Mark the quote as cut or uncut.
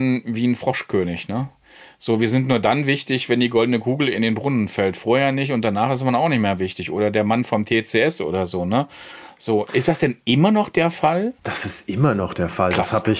cut